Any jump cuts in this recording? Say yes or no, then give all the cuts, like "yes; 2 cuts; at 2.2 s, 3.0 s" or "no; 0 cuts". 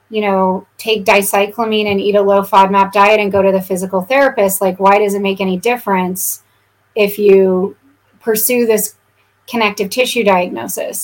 no; 0 cuts